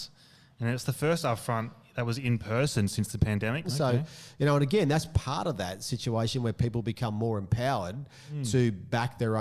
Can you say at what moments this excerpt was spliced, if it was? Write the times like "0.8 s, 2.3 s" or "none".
3.6 s